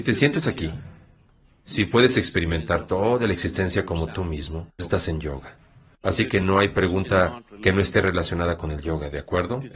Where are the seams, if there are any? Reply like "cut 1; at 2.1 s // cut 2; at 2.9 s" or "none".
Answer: cut 1; at 4.8 s